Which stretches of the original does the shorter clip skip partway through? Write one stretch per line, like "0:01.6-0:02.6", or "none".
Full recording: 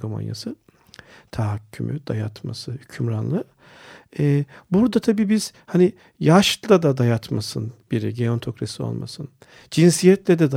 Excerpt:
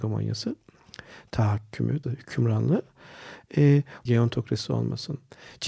0:02.0-0:02.7
0:04.7-0:08.2